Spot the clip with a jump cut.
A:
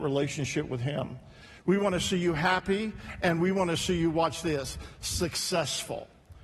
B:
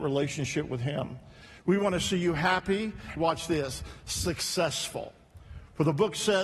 B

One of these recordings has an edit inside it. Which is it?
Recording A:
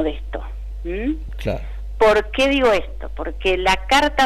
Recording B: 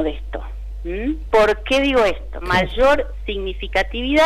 B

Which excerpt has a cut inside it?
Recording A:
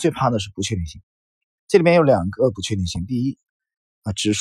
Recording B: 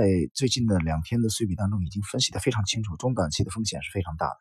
A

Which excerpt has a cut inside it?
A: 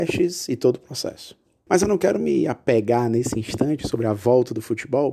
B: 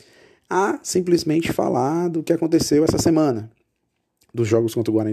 A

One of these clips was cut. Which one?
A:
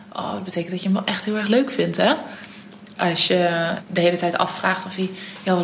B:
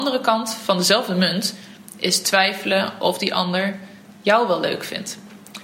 A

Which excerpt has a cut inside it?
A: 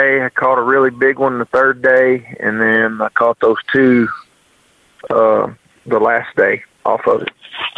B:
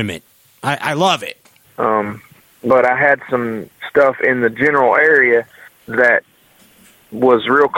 B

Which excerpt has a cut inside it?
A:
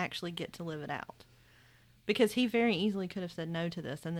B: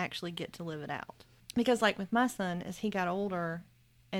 B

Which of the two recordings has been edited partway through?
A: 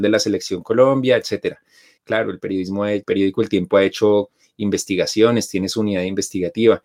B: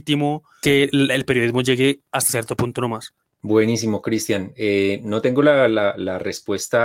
A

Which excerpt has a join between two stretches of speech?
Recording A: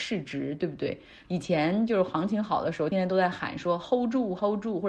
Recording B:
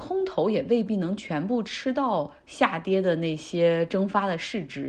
A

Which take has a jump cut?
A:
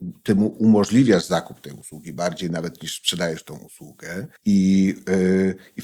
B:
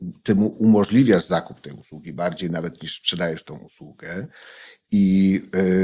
A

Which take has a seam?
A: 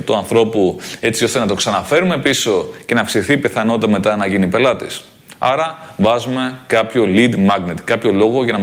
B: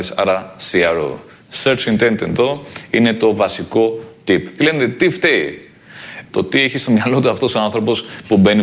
B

